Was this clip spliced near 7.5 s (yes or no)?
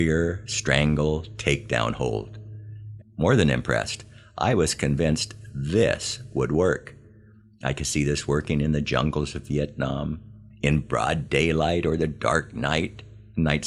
no